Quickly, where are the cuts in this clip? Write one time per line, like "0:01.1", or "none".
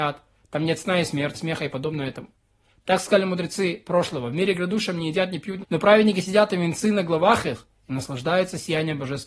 0:01.3
0:05.6